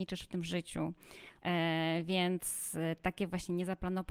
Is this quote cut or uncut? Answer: cut